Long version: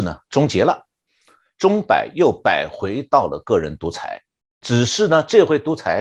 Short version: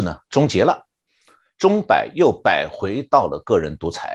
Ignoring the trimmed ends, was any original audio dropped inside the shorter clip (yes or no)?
no